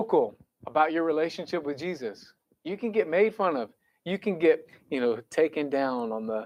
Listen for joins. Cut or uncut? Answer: uncut